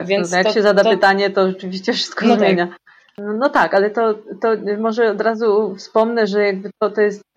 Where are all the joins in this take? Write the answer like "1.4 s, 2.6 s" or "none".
none